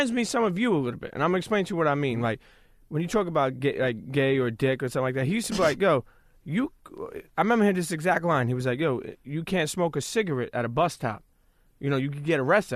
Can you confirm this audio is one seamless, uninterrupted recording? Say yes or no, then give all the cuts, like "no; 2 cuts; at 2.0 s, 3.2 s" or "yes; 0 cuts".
yes; 0 cuts